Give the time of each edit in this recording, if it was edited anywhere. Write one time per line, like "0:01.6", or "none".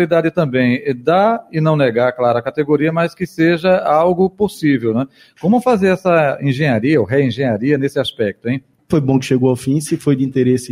0:08.8